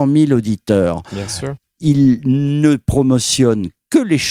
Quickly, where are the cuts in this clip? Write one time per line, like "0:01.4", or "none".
0:01.6